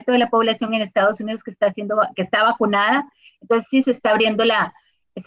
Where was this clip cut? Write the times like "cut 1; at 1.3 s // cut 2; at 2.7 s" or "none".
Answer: none